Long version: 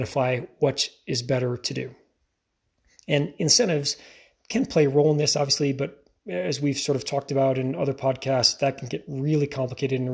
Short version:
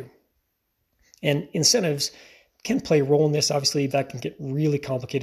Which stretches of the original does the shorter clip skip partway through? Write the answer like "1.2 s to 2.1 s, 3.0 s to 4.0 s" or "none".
5.7 s to 8.6 s